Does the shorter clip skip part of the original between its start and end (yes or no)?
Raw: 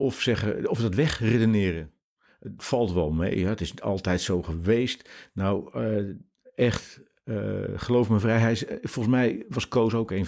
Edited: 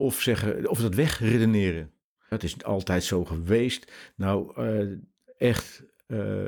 yes